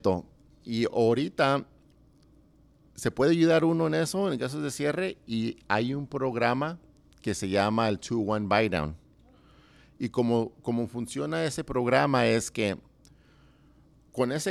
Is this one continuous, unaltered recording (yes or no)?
yes